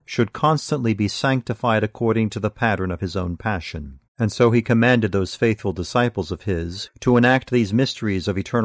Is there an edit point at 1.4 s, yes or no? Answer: no